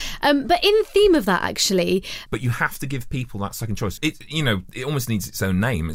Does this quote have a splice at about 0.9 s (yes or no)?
no